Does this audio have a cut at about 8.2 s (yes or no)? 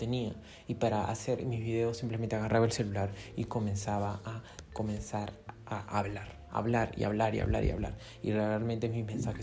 no